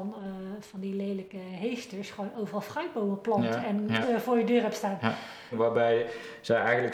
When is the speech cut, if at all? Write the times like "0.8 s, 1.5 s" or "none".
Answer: 4.0 s, 5.5 s